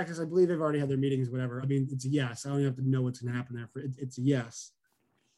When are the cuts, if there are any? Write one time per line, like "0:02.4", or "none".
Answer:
none